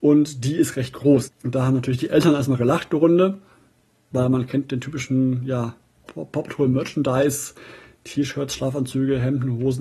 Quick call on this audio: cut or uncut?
cut